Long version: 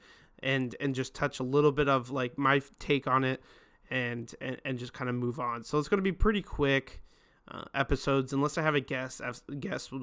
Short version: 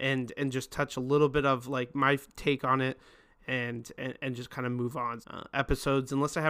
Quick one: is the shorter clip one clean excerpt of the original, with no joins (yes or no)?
no